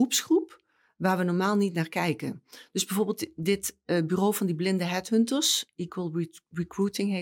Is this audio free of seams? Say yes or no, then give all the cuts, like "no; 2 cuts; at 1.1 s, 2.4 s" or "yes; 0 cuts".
yes; 0 cuts